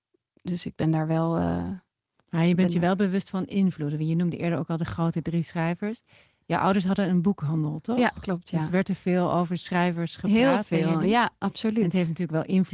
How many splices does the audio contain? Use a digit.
0